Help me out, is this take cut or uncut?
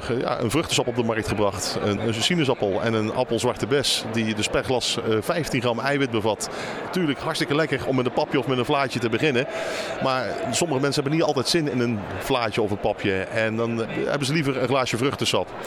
cut